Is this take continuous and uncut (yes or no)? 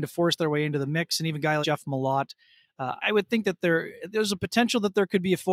no